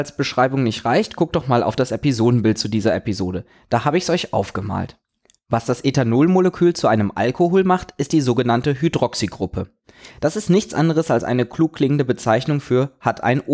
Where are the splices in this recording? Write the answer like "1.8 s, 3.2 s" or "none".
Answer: none